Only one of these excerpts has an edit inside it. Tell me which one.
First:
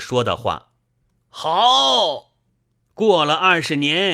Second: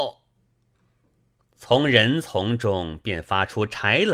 first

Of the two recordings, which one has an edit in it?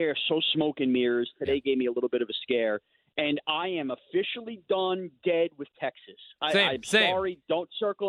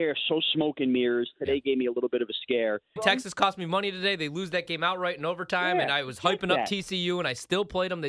second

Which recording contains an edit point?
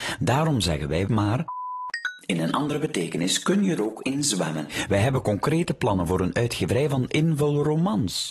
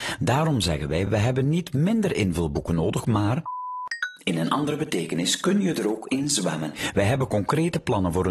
first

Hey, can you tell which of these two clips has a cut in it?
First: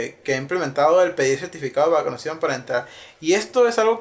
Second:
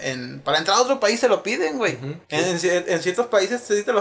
second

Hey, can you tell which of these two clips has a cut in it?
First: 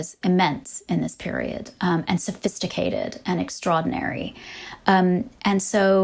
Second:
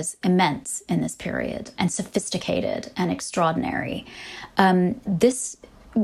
second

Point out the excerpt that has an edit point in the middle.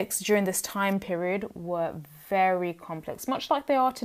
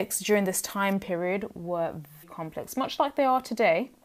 second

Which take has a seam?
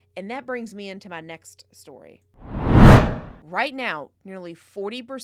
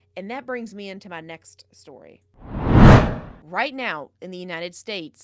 first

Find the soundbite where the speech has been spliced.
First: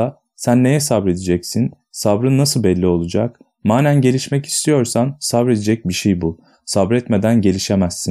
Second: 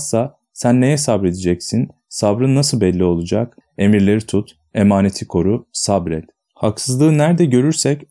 second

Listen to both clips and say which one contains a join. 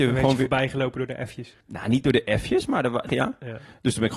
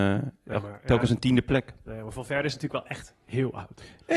first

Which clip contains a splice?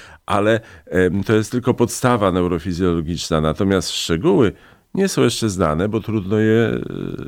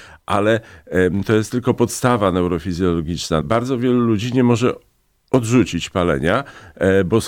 second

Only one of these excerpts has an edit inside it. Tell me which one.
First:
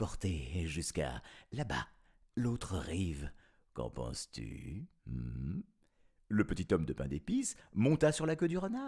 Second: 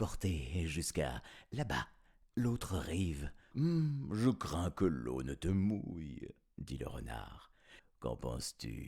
second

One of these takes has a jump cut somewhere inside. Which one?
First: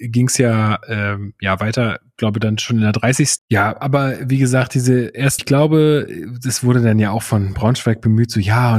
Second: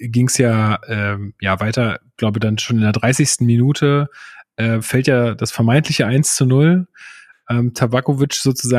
first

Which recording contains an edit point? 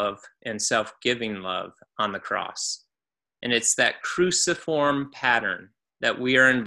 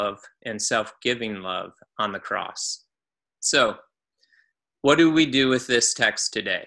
second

